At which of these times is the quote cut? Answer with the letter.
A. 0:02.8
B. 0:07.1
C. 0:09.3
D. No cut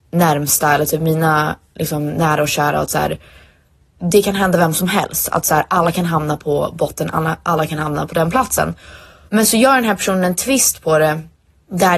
C